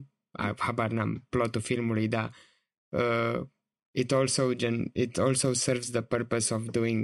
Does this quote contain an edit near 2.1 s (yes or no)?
no